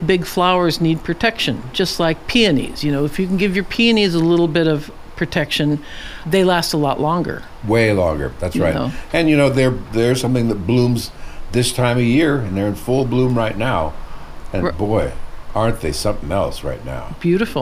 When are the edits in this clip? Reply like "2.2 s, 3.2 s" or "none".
6.2 s

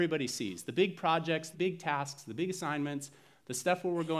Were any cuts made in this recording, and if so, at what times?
1.5 s

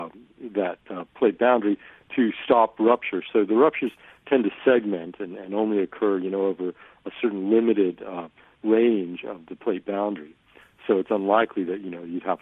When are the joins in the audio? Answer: none

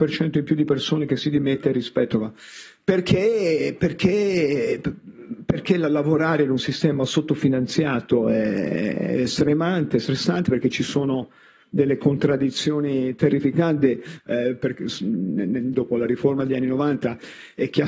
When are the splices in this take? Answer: 14.2 s, 15.7 s

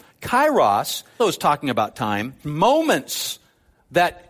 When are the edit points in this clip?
1.2 s, 2.4 s

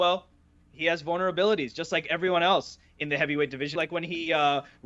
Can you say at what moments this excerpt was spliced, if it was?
3.8 s

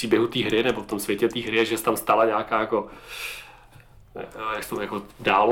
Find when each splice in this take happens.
none

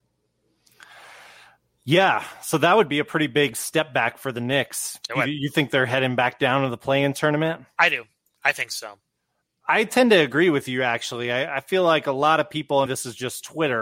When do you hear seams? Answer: 12.9 s

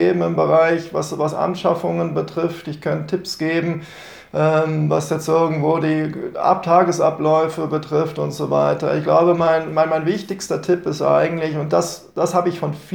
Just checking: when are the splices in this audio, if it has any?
none

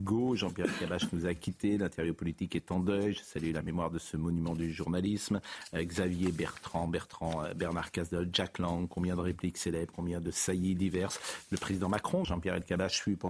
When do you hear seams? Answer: 9.9 s, 12.2 s

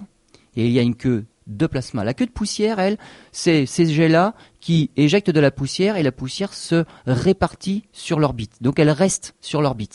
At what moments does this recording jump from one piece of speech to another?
none

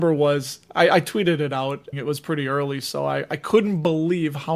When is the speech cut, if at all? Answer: 1.9 s

